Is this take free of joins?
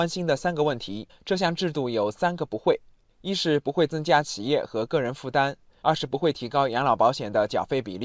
no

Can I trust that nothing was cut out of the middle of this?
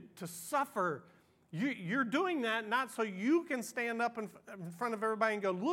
yes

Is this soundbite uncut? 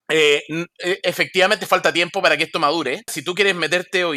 no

